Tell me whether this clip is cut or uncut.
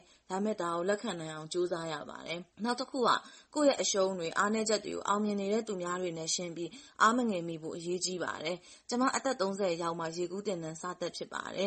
cut